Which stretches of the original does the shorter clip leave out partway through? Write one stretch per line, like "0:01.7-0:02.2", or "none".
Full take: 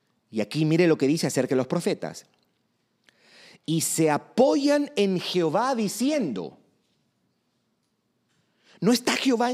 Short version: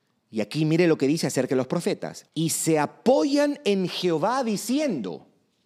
0:02.3-0:03.6